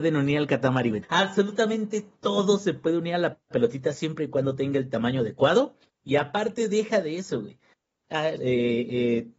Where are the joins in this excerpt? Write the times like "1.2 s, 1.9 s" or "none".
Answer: 1.0 s, 5.9 s, 8.4 s